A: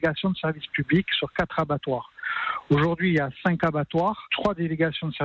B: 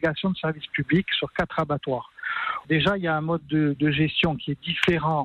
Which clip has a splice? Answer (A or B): B